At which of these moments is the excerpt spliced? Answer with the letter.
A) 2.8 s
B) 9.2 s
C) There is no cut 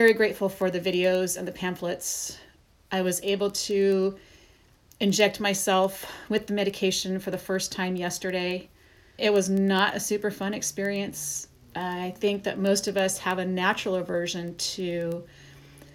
B